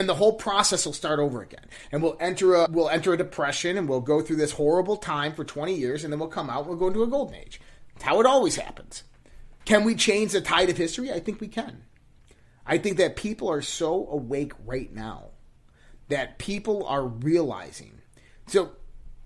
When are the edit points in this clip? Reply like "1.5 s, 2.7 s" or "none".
2.7 s, 9.6 s